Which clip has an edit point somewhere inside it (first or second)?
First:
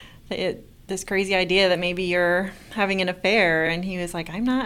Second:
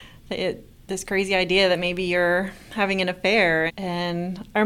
second